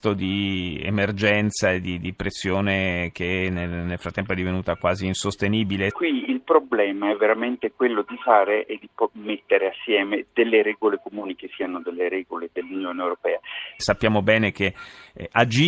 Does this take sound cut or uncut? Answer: cut